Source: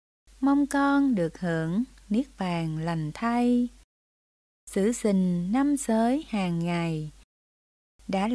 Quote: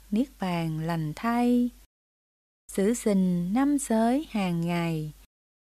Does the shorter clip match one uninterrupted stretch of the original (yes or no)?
yes